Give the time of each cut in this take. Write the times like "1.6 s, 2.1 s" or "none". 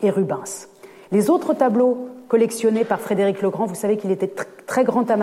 none